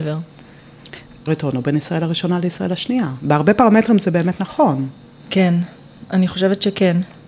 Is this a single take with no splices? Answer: no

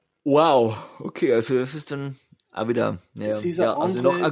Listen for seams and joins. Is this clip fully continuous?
yes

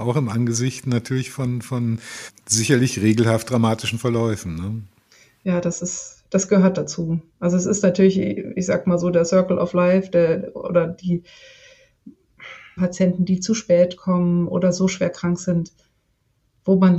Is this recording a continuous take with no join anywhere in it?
no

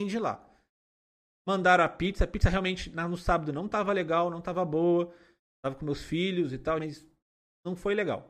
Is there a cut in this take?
yes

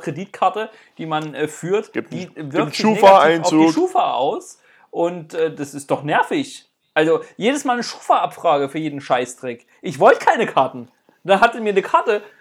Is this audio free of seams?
yes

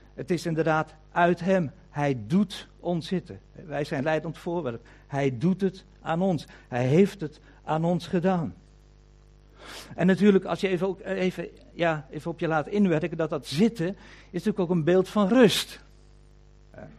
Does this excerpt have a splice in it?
no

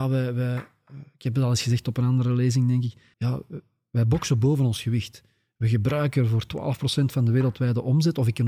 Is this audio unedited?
no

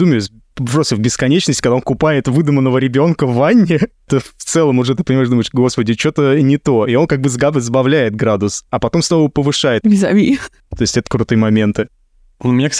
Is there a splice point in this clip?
yes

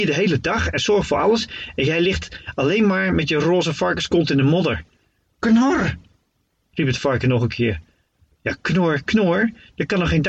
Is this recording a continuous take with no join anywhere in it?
yes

